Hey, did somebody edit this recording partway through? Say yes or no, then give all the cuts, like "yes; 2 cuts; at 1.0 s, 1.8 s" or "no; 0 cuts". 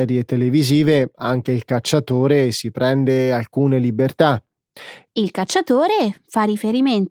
yes; 1 cut; at 5.1 s